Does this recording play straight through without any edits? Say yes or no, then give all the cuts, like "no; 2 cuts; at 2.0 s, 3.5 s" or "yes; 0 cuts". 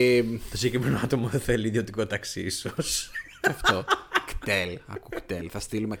yes; 0 cuts